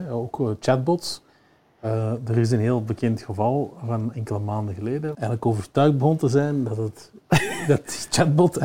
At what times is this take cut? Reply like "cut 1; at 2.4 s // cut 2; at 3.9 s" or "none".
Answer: cut 1; at 5.1 s